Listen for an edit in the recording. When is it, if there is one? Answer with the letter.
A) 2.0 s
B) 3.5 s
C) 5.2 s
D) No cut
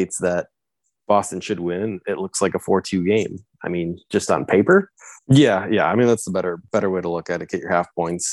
C